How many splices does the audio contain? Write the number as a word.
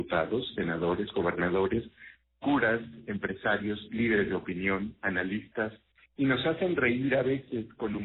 zero